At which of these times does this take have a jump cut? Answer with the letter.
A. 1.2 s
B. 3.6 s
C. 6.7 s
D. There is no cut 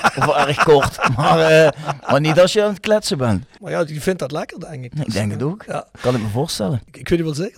B